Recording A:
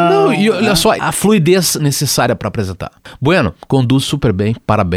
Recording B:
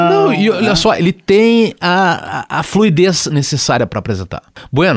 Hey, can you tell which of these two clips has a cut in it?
A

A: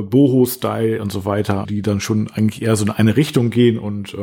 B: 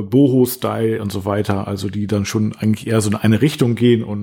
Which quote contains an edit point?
A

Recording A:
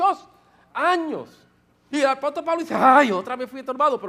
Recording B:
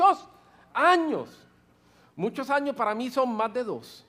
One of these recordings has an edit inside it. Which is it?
A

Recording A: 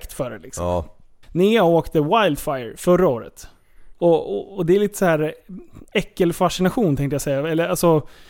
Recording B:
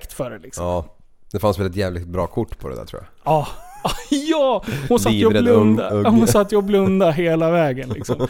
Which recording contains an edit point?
A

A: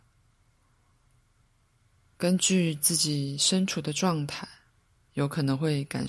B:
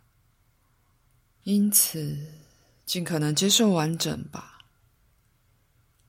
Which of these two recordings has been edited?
B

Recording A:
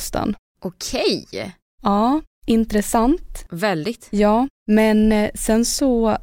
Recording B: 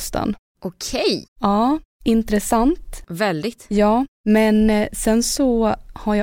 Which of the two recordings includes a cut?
B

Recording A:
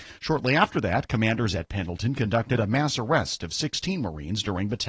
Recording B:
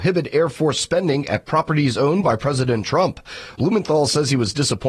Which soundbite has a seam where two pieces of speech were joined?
B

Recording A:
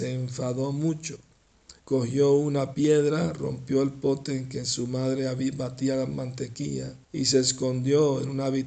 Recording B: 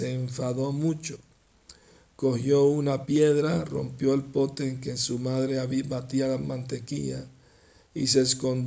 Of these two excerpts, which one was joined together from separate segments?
A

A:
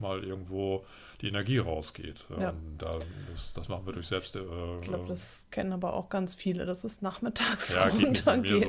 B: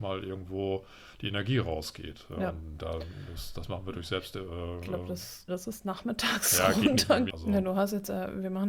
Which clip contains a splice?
B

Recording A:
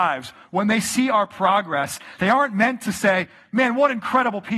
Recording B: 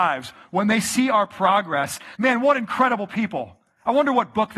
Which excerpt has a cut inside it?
B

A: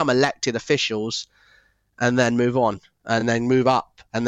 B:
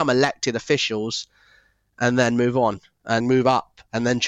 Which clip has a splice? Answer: B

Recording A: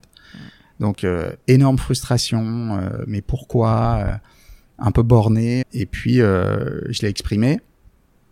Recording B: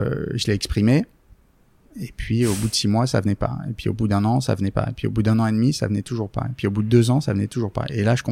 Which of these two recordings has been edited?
A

